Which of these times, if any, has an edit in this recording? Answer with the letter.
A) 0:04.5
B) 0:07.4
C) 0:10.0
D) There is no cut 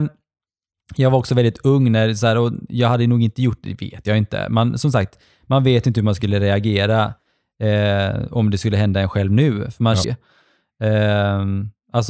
C